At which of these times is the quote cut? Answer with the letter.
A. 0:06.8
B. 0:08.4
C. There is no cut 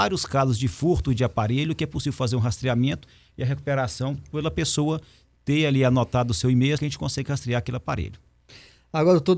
A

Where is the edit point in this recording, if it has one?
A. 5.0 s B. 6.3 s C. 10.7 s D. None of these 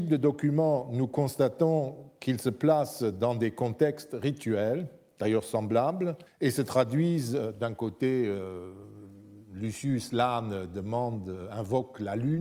B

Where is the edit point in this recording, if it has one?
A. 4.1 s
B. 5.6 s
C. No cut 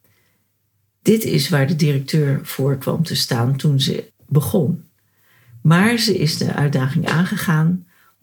A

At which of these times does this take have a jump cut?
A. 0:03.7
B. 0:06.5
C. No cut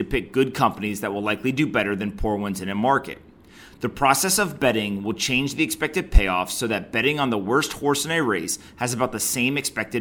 A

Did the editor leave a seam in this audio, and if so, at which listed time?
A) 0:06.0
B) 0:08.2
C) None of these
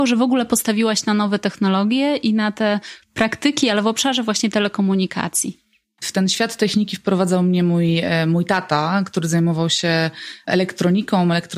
A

